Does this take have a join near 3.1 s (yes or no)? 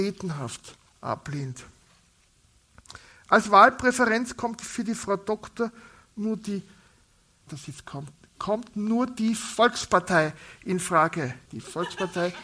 no